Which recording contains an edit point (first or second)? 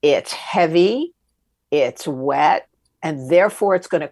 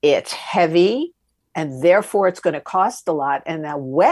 second